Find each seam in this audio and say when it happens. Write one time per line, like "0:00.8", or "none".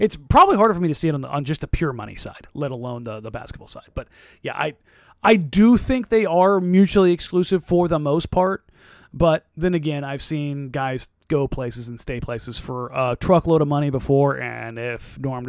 none